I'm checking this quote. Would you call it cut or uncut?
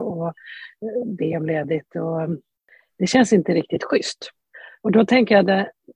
cut